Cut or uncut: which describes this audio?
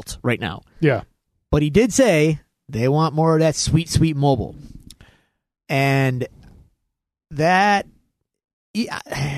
uncut